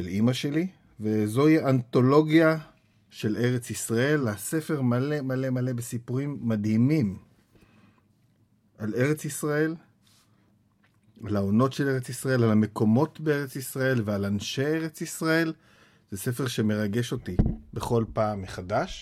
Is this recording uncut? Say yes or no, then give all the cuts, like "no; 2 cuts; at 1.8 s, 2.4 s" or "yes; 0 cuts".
yes; 0 cuts